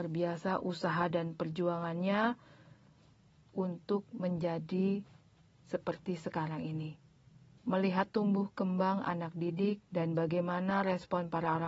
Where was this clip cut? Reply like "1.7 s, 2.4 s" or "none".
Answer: 7.6 s, 9.8 s